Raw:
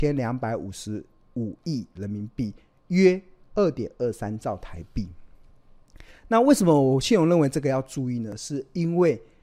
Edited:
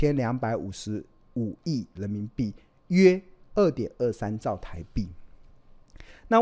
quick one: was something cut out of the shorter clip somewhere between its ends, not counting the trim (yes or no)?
no